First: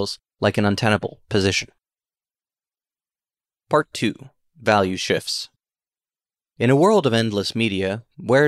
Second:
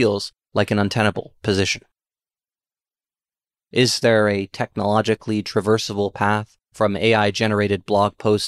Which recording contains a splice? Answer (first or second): second